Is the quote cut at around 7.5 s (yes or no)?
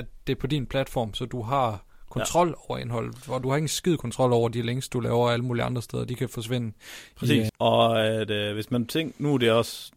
yes